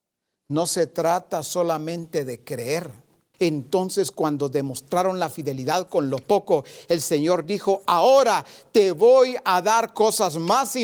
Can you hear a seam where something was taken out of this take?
yes; 1 cut; at 3.3 s

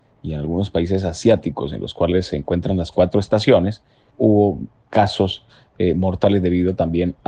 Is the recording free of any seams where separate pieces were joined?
no; 1 cut; at 4.1 s

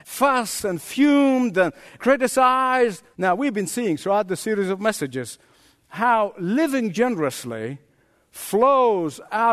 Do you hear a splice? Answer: yes; 1 cut; at 3.1 s

